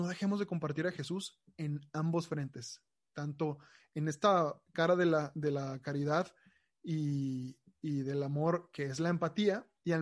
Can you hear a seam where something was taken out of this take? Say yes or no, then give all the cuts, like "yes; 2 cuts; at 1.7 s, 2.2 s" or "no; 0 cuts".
no; 0 cuts